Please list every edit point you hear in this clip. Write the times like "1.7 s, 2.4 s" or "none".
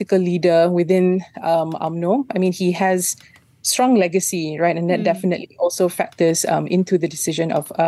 none